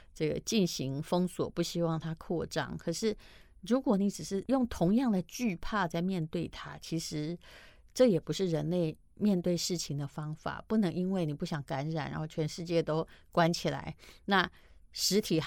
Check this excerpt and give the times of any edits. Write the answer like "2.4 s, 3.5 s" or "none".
none